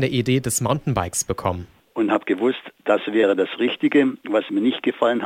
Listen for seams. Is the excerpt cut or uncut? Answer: cut